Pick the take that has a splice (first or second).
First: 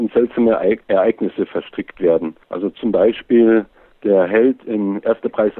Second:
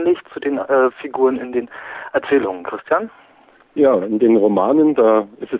first